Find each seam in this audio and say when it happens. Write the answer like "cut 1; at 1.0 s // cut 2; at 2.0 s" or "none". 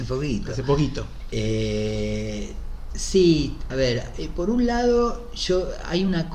cut 1; at 3.7 s